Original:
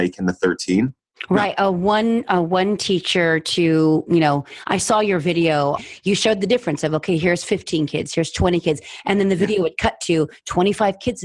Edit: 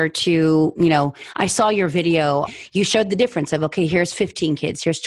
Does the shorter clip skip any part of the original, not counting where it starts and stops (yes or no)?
no